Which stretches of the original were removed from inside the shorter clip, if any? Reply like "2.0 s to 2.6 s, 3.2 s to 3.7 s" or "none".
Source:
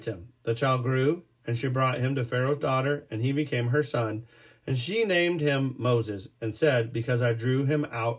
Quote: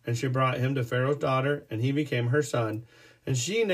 none